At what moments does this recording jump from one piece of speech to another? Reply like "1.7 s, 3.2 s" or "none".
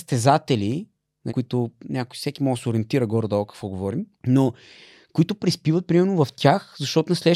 1.3 s, 4.1 s